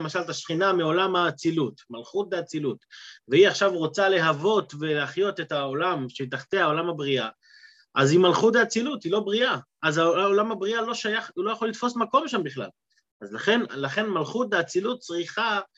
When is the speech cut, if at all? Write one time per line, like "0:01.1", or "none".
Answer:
0:13.7